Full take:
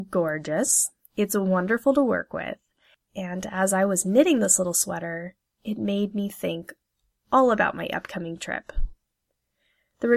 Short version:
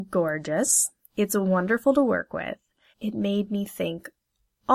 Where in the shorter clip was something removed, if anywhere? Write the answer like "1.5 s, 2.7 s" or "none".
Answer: 2.9 s